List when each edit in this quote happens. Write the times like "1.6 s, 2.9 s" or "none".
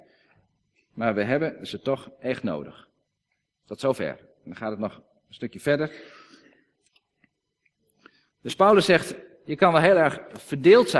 none